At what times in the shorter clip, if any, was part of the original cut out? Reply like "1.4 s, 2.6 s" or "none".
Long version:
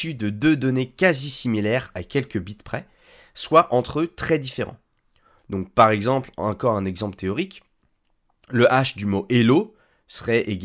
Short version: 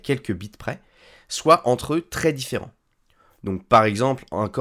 none